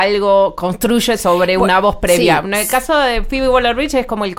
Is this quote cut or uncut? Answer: uncut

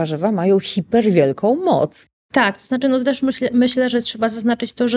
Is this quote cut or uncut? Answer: uncut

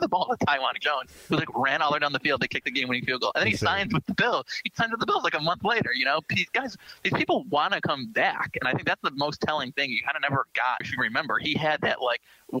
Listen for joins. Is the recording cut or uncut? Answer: cut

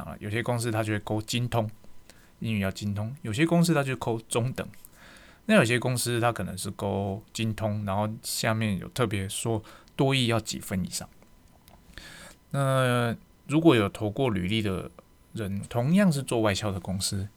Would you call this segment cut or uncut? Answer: cut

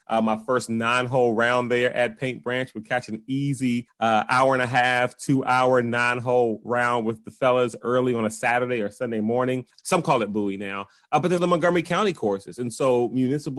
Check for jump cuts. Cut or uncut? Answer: cut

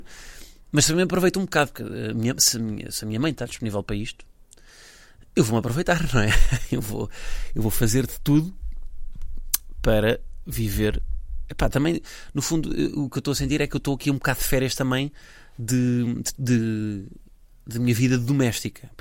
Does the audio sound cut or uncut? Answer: cut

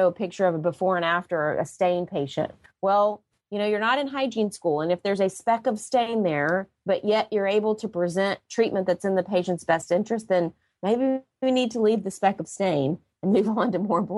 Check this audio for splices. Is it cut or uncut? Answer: uncut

